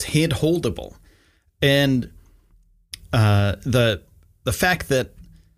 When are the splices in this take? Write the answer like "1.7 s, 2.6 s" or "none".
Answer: none